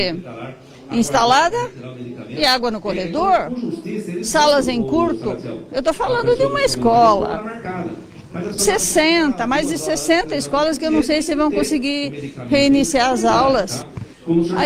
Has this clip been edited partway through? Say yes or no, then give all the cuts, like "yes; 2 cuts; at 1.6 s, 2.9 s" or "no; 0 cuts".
yes; 1 cut; at 8.6 s